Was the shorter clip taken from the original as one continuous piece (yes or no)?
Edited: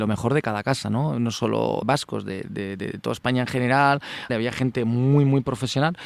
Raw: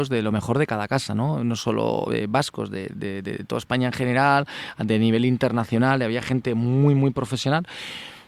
no